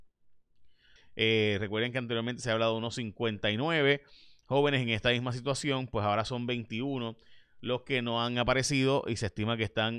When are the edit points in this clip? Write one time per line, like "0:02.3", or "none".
0:01.0